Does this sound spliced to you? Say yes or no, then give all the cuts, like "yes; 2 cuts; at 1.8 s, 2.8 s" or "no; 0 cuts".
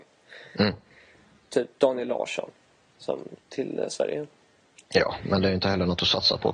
yes; 1 cut; at 3.4 s